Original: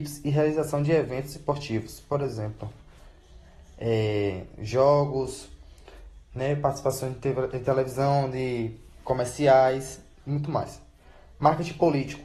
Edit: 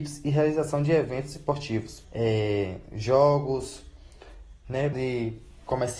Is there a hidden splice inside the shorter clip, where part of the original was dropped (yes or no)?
yes